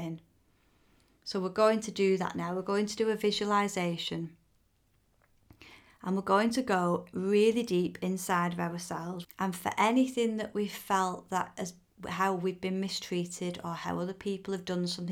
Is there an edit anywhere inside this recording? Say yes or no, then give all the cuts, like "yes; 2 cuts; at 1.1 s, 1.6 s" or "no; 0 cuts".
yes; 1 cut; at 9.2 s